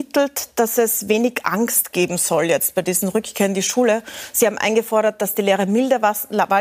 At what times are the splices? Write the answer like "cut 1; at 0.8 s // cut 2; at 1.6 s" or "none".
none